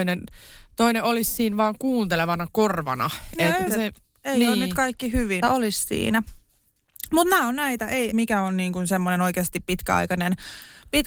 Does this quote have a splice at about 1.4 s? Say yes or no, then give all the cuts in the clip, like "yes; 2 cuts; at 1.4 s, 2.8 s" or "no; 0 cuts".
no; 3 cuts; at 3.7 s, 5.4 s, 8.1 s